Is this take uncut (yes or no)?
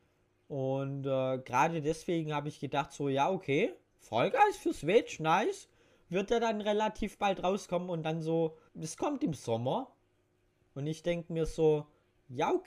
no